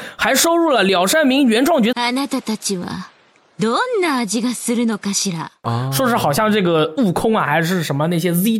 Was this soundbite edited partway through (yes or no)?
yes